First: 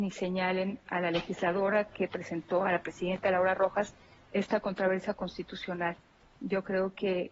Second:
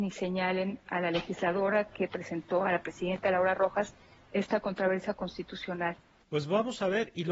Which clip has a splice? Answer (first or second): second